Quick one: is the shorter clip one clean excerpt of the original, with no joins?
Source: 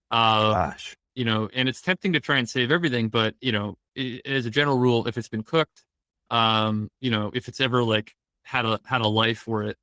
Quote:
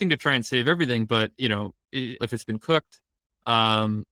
no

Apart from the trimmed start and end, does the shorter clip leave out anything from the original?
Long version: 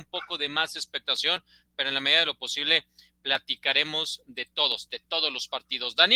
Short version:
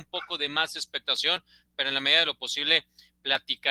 no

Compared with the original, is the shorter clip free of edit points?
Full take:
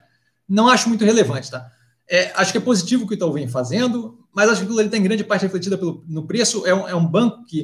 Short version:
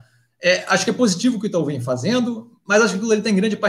yes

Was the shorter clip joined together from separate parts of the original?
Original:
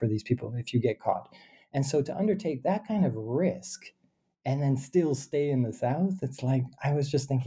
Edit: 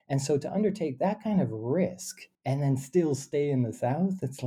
yes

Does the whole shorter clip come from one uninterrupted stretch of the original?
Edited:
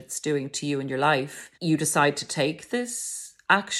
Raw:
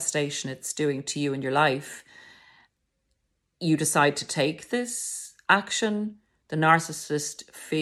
no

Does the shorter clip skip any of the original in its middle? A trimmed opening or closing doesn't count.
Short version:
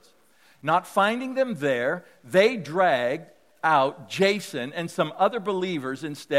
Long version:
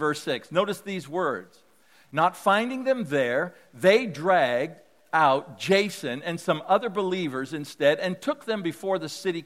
no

